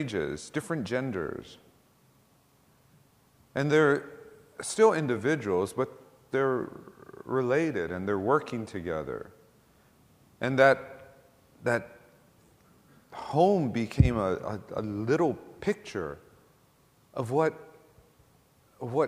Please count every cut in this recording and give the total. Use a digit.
0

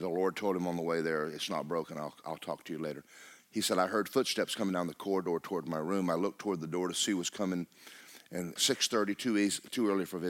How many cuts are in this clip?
1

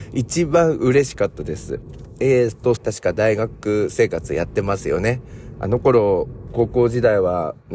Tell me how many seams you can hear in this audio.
2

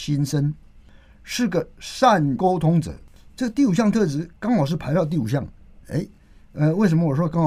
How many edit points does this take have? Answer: 0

